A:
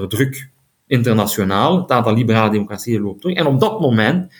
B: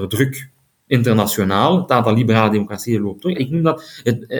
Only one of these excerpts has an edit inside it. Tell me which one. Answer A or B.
B